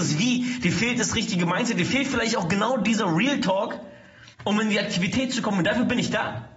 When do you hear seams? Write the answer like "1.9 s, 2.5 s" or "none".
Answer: 4.3 s